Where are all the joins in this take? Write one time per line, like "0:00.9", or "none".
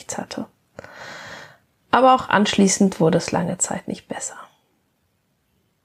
none